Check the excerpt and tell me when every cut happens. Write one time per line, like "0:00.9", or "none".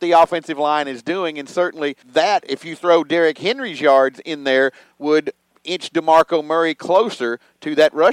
0:02.0